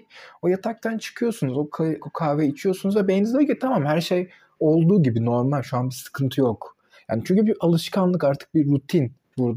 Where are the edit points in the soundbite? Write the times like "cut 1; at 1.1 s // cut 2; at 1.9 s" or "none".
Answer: cut 1; at 2.0 s